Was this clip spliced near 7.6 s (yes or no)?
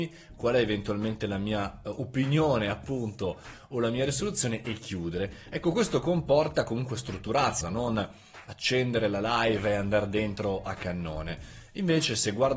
yes